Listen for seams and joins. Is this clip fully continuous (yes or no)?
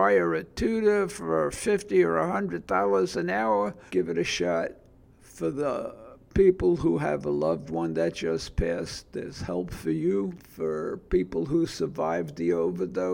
no